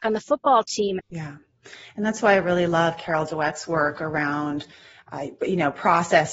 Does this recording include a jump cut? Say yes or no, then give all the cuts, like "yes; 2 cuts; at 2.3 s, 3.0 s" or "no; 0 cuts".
yes; 1 cut; at 1.0 s